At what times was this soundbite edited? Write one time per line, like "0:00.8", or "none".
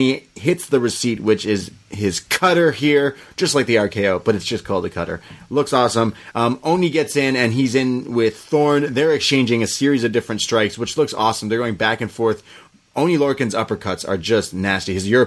0:06.3

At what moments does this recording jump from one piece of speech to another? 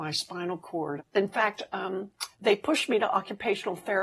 0:01.0
0:02.3

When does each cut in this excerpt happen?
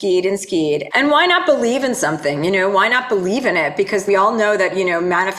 0:00.9

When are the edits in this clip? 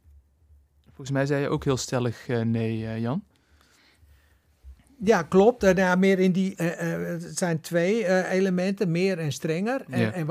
0:06.5

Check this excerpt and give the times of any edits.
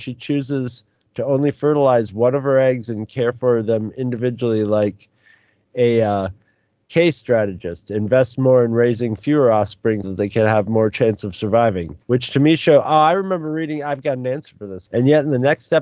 0:10.0
0:12.0
0:14.9

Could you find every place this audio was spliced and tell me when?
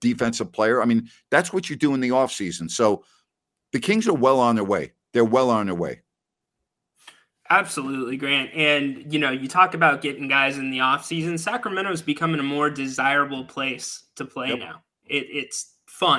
none

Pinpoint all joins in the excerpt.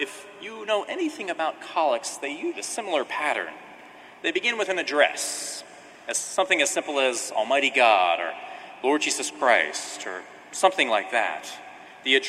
0:02.5

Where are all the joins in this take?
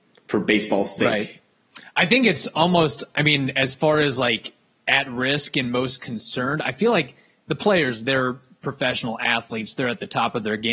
none

